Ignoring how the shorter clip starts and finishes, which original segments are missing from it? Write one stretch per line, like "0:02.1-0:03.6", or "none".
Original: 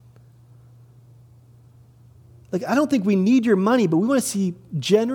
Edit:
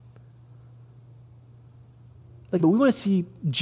0:02.6-0:03.9